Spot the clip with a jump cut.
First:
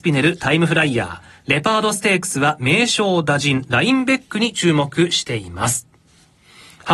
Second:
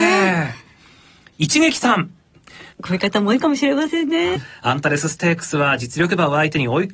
second; 2 cuts; at 2.7 s, 4.4 s

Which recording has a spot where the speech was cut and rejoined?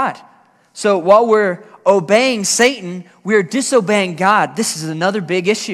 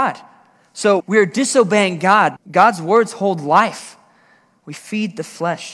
second; 3 cuts; at 1.0 s, 2.4 s, 4.6 s

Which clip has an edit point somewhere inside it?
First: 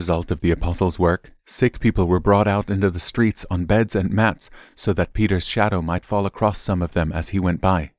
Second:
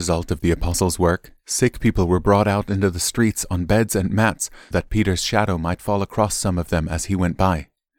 second; 1 cut; at 4.7 s

